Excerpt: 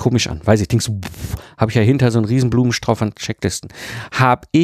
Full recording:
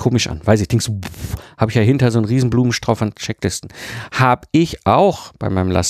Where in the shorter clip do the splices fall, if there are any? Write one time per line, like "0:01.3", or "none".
none